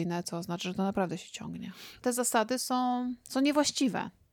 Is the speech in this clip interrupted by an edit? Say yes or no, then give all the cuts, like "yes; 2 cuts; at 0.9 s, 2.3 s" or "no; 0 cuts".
yes; 1 cut; at 2.0 s